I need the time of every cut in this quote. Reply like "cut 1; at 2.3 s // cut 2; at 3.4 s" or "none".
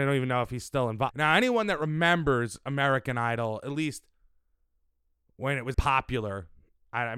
cut 1; at 1.1 s // cut 2; at 5.7 s